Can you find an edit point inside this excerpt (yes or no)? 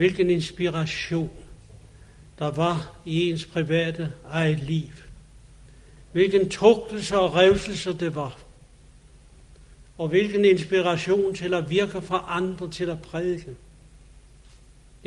yes